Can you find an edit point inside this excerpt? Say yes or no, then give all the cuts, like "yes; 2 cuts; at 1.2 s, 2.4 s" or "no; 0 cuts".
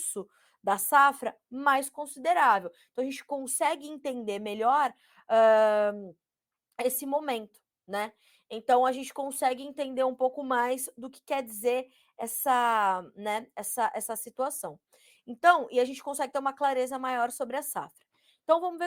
no; 0 cuts